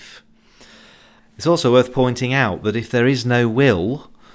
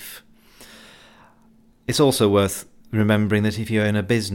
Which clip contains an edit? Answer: first; 1 cut; at 1.2 s

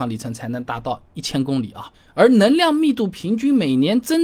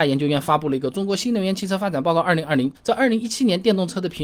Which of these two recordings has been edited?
second; 1 cut; at 2.7 s

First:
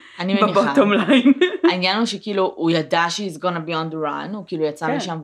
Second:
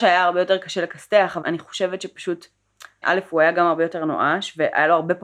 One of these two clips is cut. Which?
second; 2 cuts; at 1.4 s, 3.0 s

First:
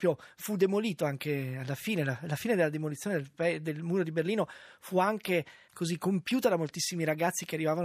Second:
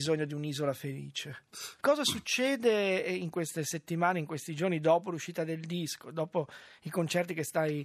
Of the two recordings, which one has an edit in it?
second; 1 cut; at 1.8 s

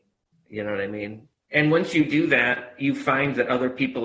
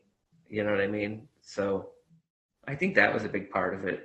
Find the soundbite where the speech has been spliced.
first; 1 cut; at 1.3 s

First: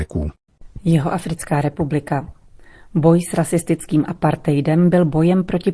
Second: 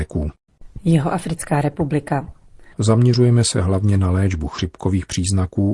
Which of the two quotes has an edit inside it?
second; 1 cut; at 2.7 s

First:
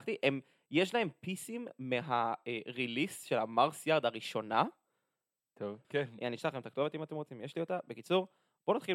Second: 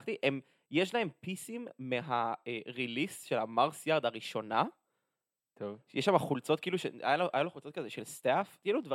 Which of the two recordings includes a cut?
first; 1 cut; at 5.8 s

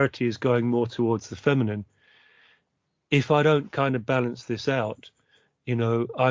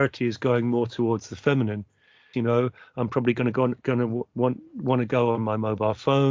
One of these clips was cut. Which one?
second; 1 cut; at 2.3 s

